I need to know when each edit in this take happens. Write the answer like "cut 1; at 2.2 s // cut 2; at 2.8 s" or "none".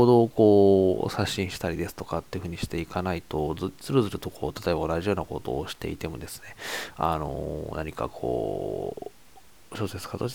none